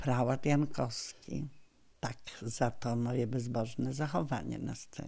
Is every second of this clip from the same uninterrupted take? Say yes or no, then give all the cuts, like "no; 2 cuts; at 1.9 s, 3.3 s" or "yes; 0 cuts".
no; 1 cut; at 1.9 s